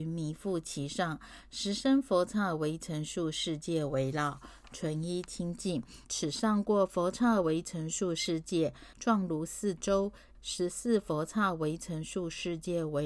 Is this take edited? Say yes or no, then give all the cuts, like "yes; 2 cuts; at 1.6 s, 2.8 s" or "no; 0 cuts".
yes; 3 cuts; at 6.0 s, 8.9 s, 10.3 s